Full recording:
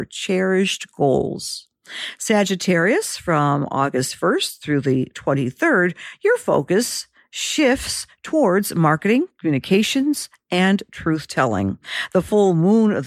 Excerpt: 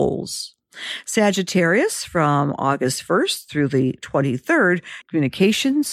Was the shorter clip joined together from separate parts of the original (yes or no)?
yes